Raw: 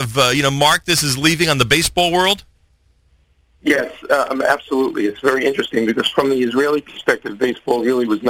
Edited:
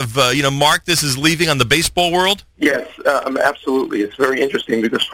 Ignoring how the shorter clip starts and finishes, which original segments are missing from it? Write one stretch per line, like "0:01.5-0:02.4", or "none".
0:02.5-0:03.5

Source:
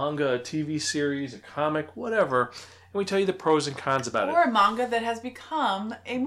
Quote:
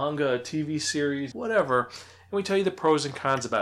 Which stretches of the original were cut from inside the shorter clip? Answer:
0:01.3-0:01.9

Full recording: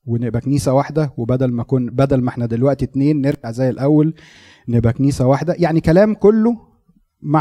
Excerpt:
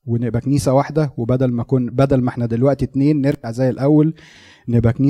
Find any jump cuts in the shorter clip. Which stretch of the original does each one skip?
none

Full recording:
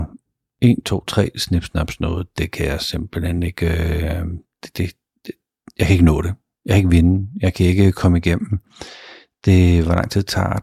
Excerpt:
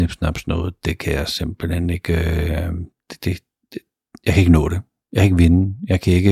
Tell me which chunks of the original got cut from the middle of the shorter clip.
none

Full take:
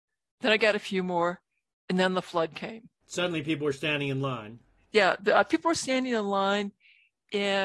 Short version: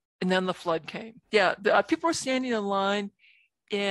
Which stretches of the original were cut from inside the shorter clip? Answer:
0:02.9-0:04.8

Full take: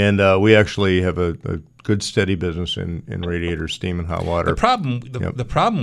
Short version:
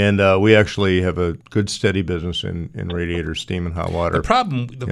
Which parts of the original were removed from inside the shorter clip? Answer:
0:01.4-0:01.7

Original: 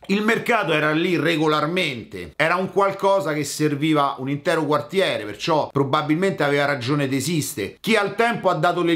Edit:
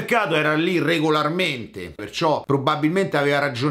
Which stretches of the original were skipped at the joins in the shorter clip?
0:02.4-0:05.3

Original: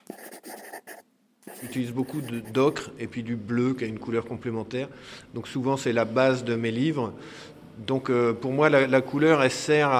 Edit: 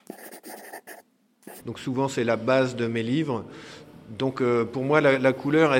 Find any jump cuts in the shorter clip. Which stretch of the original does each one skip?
0:01.6-0:05.3

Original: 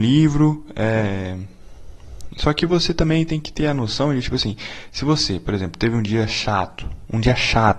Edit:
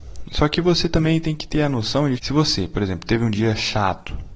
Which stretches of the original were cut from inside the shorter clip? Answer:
0:04.2-0:04.9

